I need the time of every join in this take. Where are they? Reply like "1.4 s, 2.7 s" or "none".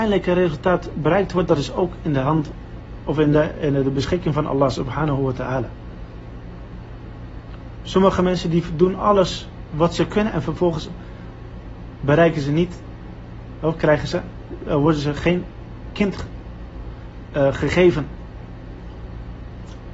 none